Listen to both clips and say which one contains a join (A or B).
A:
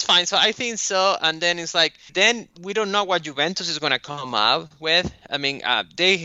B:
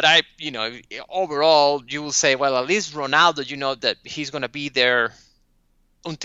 A